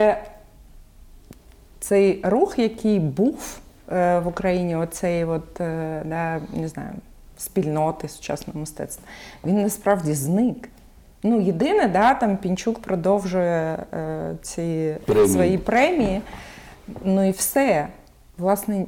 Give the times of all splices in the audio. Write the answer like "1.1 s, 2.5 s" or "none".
none

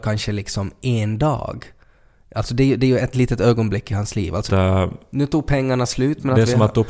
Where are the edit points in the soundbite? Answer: 3.1 s, 4.5 s

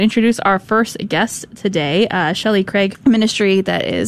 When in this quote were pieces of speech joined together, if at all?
2.9 s

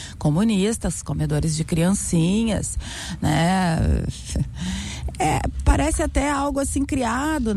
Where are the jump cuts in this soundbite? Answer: 5.1 s

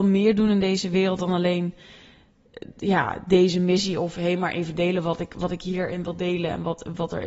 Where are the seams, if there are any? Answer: none

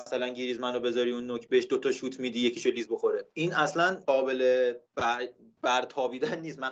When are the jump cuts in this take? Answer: 4.8 s

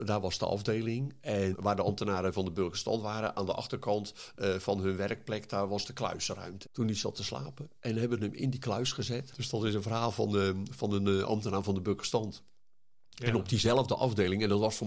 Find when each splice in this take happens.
1.5 s, 6.6 s, 9.3 s

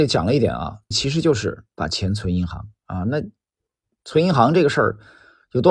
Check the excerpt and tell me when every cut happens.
0.9 s

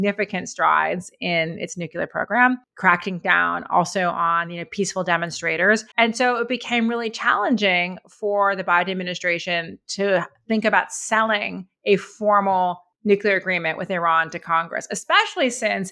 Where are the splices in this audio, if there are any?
5.9 s

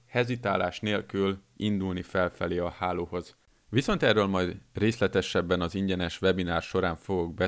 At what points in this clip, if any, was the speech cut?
none

